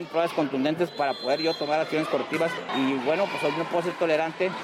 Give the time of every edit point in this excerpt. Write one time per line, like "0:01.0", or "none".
0:02.7